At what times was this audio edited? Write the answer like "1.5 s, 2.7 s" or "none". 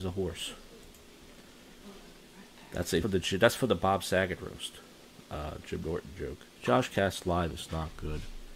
3.0 s, 6.5 s